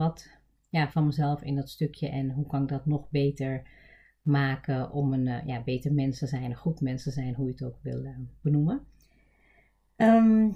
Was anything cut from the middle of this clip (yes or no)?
yes